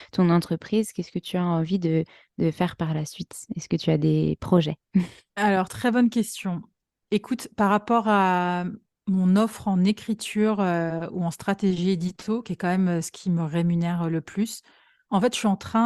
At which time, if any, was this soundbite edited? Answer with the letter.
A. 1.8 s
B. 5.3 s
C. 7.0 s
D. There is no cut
D